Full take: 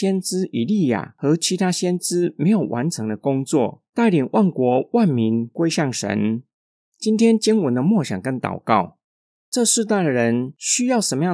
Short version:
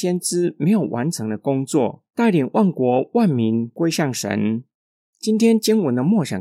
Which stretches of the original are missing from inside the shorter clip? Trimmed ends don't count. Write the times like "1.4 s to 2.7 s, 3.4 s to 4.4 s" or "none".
none